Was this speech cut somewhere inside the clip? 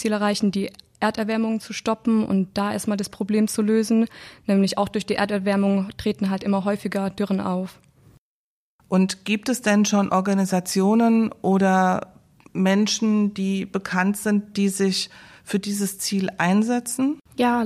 no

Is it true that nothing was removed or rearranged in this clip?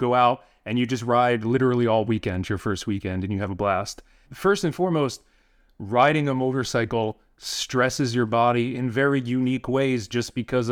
no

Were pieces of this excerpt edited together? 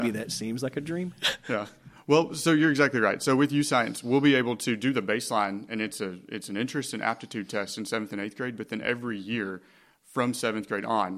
no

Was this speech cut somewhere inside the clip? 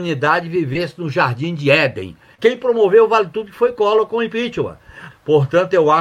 yes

